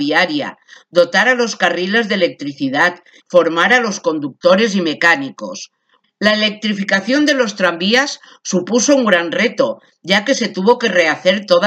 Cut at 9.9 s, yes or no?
no